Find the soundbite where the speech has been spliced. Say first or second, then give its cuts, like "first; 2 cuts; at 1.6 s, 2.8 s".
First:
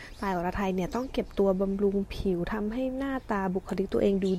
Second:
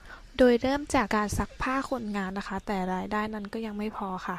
second; 1 cut; at 1.1 s